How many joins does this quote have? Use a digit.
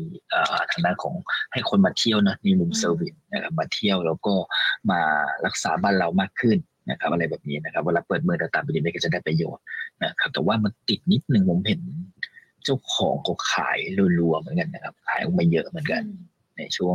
0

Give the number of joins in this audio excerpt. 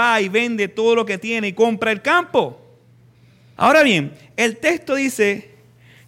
1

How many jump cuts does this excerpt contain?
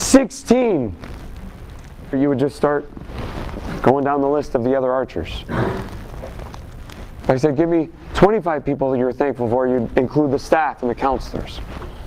1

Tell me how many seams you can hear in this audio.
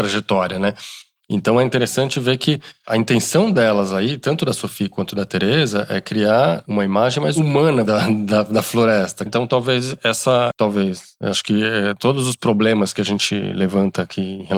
3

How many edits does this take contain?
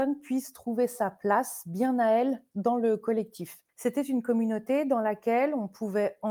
1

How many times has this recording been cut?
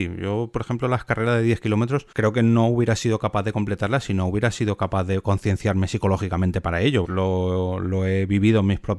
2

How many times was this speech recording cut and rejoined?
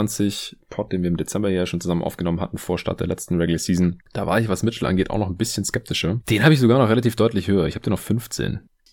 1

